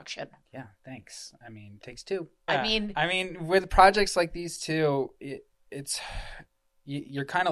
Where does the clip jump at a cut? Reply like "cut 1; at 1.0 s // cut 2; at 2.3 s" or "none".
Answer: cut 1; at 2.5 s